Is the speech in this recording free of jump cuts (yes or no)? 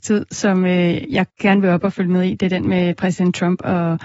no